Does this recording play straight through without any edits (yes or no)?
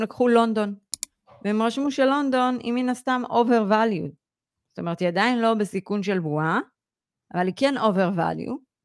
yes